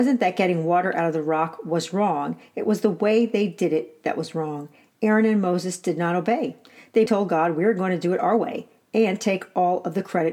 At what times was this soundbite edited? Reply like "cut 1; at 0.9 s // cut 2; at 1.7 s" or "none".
cut 1; at 7.1 s